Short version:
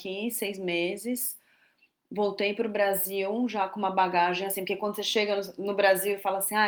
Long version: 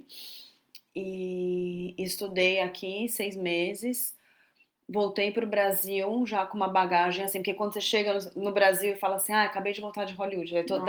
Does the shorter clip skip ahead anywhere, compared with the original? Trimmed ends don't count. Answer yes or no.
no